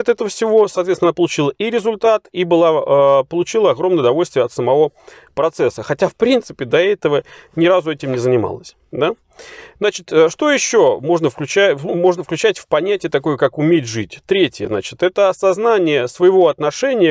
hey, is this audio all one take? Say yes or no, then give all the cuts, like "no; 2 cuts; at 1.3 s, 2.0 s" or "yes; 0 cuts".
yes; 0 cuts